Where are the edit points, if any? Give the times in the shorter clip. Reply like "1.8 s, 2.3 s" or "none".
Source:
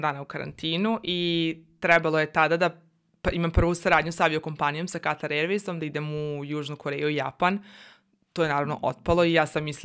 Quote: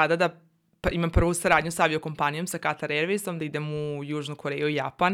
none

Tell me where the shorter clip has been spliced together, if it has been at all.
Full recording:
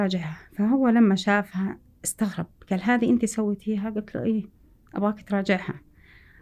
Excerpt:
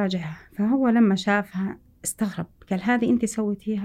none

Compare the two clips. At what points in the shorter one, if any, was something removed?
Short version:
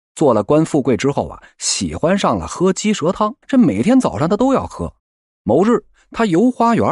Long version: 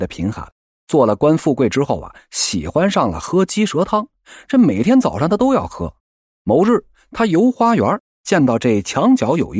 3.4 s

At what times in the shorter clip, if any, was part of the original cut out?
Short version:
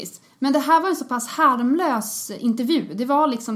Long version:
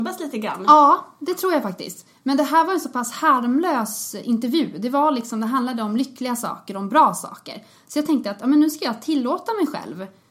none

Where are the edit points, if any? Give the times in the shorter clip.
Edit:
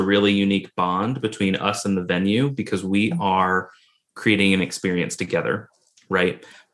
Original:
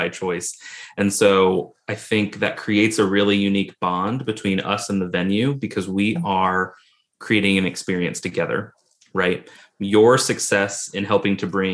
none

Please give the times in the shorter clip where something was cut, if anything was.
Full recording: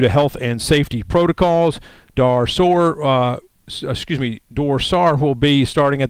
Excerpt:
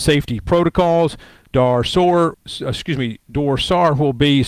2.3 s

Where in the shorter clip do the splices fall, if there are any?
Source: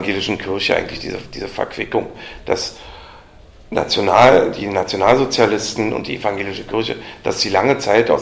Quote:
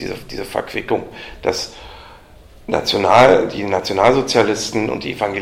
none

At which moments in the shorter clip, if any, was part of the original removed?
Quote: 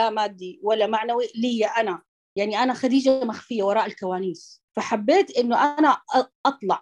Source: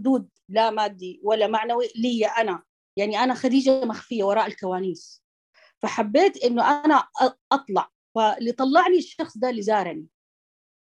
4.7 s

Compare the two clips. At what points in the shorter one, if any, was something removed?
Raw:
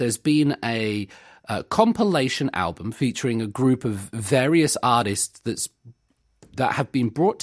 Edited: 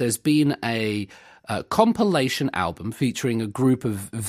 none

